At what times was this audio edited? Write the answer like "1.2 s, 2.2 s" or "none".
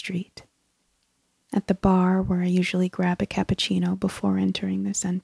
1.4 s